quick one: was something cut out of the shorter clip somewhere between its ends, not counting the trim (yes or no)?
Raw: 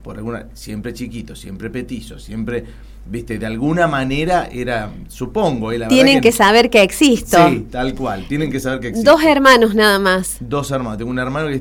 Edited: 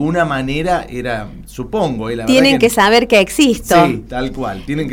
no